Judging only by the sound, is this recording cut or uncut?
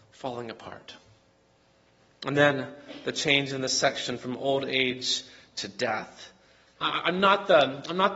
cut